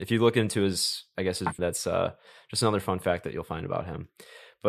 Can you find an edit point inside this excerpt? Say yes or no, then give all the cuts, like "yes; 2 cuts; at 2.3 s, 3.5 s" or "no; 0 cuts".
yes; 1 cut; at 1.6 s